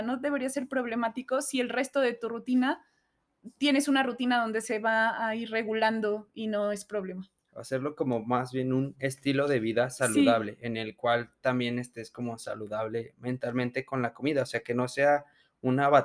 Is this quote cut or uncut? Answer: uncut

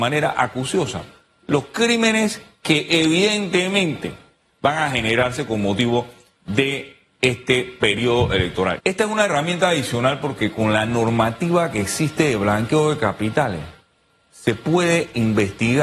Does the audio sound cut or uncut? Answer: cut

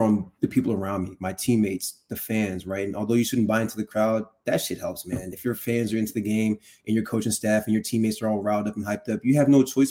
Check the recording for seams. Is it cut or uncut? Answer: uncut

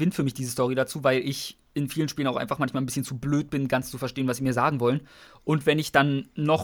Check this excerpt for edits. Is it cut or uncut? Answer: uncut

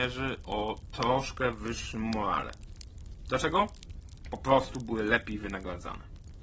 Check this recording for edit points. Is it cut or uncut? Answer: uncut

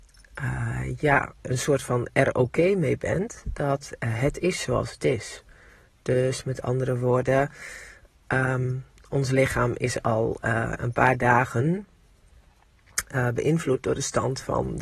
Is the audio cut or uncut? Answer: uncut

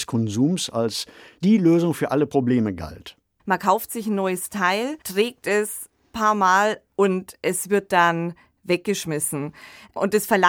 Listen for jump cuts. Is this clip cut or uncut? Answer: cut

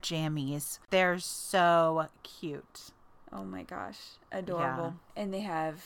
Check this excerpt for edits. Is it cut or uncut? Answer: uncut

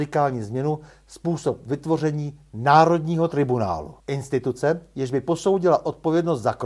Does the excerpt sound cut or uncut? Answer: cut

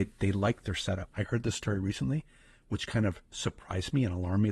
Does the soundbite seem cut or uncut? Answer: cut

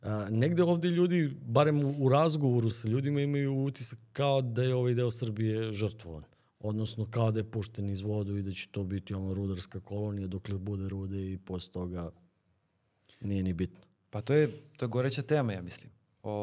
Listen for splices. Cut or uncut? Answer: cut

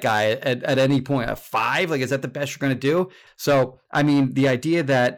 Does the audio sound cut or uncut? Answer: cut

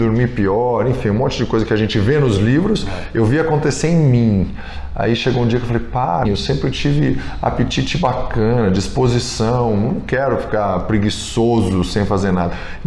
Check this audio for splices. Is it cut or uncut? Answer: cut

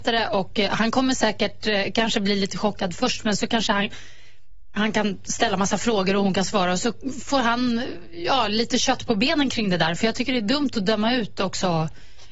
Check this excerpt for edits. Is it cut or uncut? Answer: uncut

